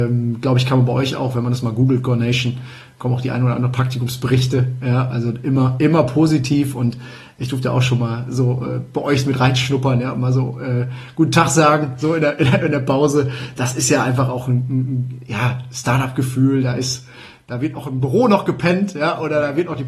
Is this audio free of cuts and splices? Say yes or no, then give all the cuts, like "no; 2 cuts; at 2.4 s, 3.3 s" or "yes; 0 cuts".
yes; 0 cuts